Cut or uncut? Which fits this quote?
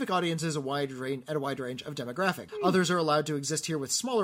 cut